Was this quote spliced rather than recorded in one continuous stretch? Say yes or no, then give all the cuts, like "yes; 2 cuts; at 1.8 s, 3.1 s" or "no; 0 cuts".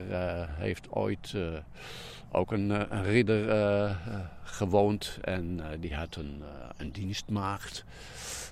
no; 0 cuts